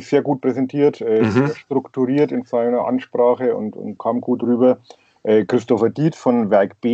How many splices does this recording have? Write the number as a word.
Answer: one